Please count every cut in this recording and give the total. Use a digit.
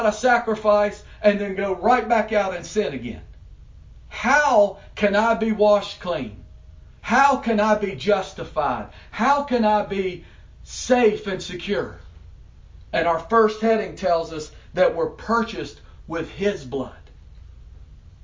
0